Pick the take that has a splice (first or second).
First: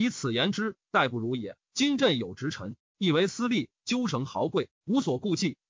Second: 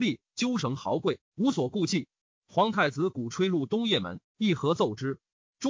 first